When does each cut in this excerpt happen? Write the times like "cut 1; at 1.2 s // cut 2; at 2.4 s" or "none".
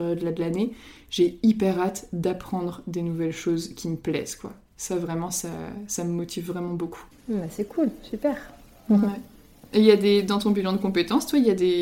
none